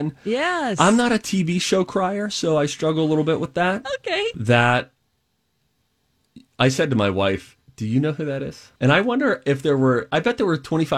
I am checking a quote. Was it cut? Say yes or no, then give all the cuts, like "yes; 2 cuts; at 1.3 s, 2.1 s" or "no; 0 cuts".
yes; 2 cuts; at 4.3 s, 8.8 s